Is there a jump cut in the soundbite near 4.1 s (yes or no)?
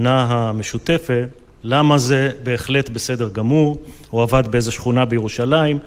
yes